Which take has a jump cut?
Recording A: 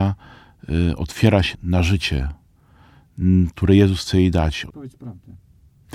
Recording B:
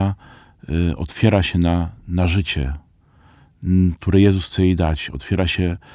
A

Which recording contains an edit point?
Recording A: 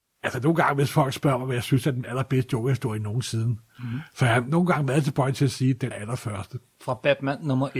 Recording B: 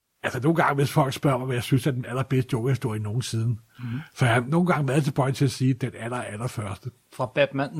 A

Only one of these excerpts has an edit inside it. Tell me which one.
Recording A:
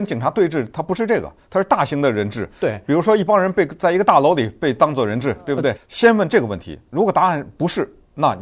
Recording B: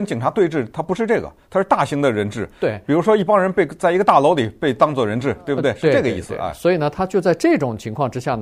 A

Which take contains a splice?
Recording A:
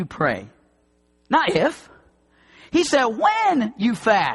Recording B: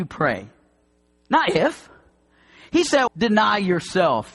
B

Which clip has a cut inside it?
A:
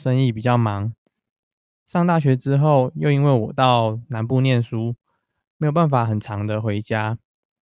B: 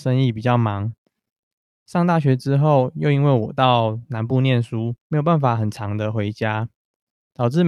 B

